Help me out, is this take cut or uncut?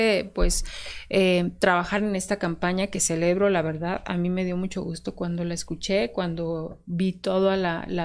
uncut